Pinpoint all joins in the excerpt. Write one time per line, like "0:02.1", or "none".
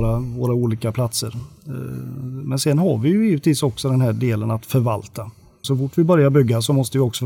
0:05.6